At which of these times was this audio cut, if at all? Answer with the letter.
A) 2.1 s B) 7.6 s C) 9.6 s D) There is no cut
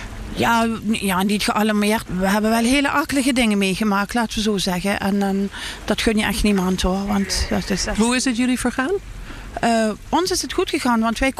A